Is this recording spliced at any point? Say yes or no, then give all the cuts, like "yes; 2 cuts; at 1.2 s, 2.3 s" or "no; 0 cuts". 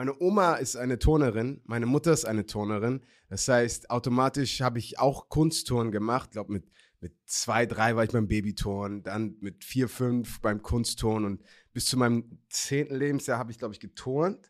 no; 0 cuts